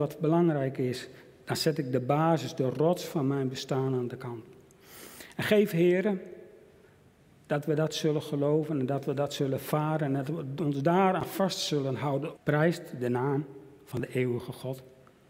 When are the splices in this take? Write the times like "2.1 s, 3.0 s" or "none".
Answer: 12.4 s